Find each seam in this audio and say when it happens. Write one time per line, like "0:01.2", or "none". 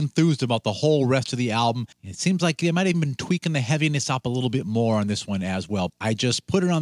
0:01.9
0:02.9
0:05.9